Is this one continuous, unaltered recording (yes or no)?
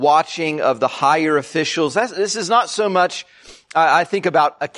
yes